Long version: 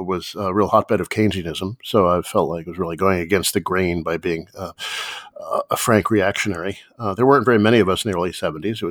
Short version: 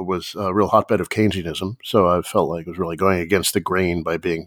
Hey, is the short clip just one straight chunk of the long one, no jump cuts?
yes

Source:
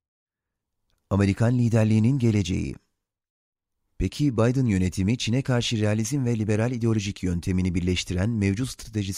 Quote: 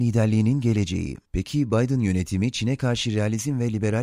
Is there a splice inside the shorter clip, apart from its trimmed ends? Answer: yes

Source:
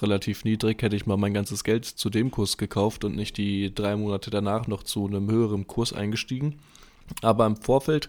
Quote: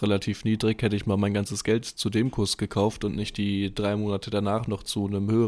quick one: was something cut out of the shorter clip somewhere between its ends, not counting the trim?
no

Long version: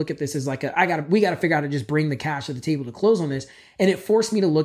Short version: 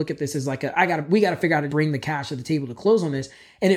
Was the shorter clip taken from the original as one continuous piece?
no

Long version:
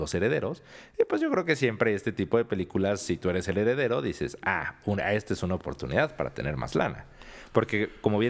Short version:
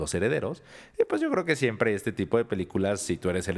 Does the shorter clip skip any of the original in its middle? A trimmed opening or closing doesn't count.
no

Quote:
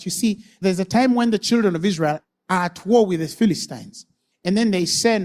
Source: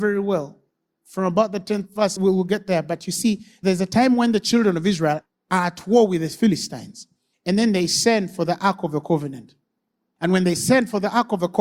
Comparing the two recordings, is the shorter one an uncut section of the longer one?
yes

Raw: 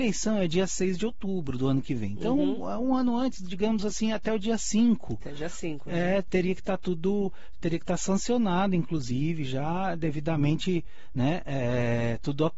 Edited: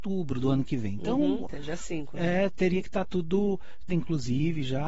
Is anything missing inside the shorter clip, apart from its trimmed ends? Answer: yes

